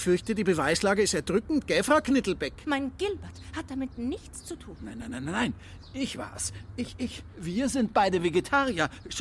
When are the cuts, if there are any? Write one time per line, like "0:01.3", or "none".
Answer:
0:02.6
0:07.3